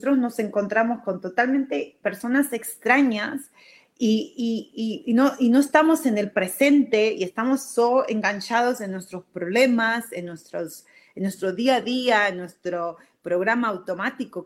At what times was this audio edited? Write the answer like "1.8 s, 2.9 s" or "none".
none